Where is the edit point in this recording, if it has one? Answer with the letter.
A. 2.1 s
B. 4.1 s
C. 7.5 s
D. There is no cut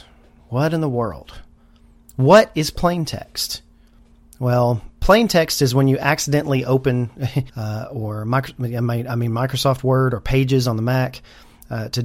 C